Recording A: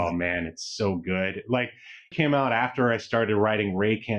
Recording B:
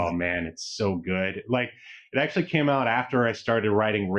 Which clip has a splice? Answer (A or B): A